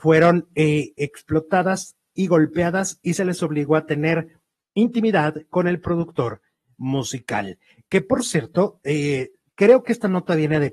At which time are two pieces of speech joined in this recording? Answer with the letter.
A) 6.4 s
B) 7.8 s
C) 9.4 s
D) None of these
D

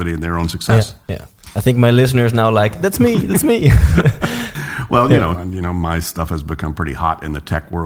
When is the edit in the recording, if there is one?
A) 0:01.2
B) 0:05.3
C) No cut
B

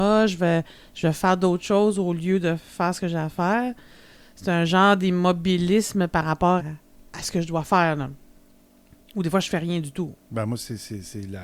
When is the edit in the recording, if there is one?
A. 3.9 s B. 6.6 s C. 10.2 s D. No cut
B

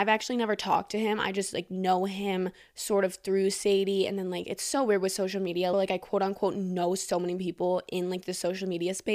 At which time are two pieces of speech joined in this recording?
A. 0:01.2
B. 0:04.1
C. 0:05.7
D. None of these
C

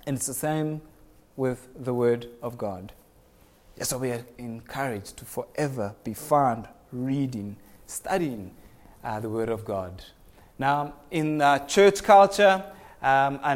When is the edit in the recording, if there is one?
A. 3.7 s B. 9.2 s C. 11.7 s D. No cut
D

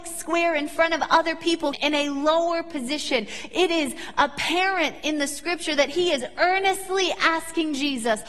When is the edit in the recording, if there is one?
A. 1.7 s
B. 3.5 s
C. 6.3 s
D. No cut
A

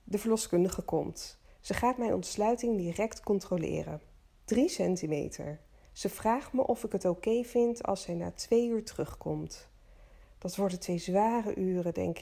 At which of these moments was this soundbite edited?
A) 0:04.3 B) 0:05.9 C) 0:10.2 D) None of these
B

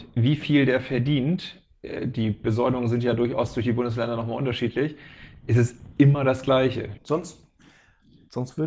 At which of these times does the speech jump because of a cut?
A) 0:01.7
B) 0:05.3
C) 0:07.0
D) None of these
C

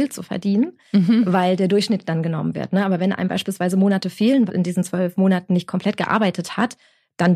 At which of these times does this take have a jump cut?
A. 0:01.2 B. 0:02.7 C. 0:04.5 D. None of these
C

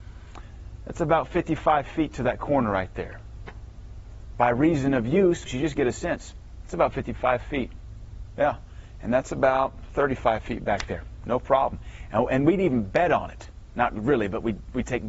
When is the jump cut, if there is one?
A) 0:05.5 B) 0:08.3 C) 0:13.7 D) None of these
A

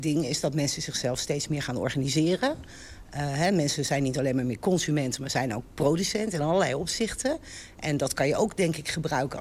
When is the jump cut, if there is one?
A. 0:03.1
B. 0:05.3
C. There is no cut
C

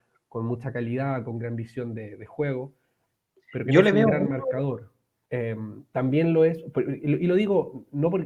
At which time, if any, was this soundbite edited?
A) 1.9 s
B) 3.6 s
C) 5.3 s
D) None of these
C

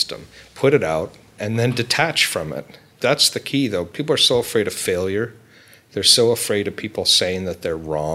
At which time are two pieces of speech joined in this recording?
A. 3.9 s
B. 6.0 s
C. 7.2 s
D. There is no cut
D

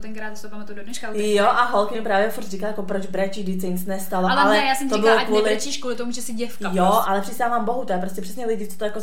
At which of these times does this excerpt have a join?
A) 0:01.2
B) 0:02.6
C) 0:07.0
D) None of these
C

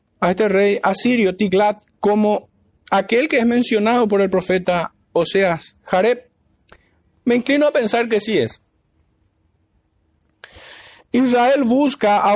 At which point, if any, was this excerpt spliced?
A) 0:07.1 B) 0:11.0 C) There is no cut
C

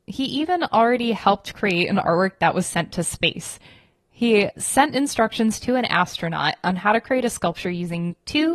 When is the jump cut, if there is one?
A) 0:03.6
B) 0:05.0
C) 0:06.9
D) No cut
D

